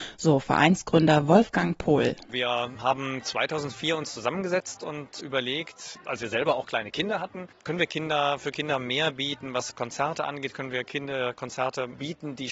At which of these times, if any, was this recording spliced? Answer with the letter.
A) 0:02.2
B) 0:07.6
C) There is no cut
C